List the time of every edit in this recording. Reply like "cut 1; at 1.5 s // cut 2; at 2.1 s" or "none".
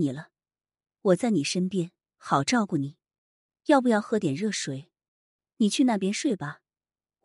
cut 1; at 5.5 s